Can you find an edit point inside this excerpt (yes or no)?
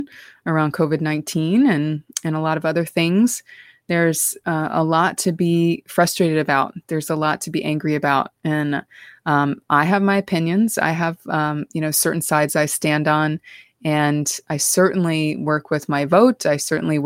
no